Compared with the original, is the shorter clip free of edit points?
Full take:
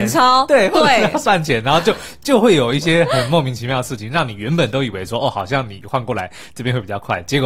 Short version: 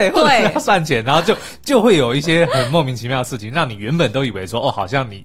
yes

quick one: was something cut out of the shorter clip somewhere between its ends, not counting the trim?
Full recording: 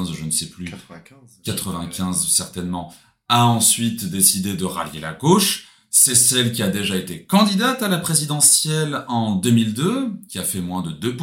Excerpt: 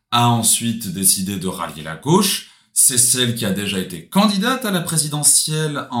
no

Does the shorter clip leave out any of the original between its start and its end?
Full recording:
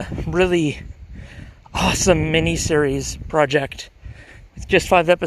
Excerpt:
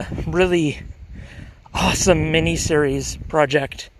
no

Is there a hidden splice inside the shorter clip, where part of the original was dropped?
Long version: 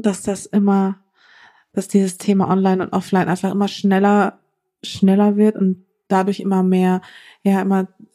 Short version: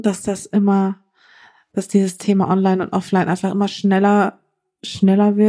no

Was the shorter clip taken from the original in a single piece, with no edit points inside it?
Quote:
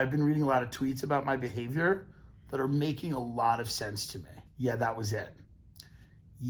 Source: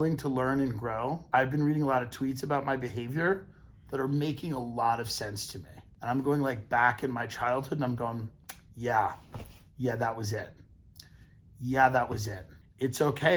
no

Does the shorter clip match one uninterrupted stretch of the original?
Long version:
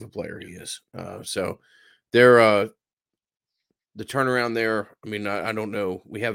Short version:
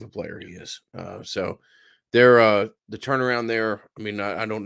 no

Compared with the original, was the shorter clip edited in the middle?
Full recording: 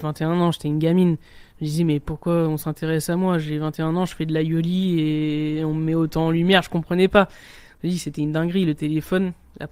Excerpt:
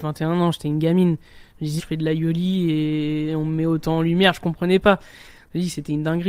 yes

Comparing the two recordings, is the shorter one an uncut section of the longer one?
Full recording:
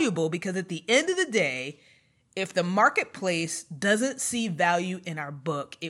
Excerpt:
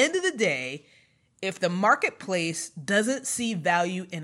yes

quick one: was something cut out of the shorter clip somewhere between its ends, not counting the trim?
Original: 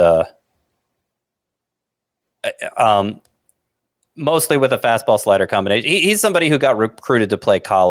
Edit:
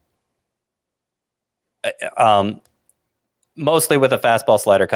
no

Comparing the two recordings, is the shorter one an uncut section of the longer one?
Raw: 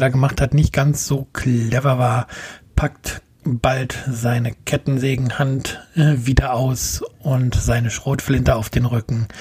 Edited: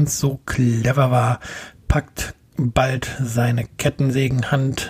yes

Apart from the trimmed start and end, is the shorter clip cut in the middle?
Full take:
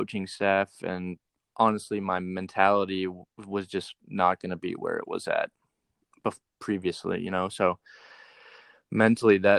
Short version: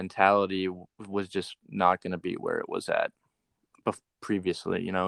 no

